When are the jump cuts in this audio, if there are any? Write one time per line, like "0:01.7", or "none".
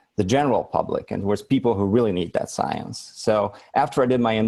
none